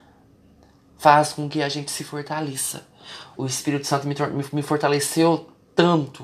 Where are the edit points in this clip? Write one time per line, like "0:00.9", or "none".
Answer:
0:03.3